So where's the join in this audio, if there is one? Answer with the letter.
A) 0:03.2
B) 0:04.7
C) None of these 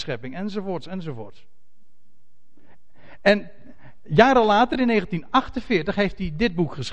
C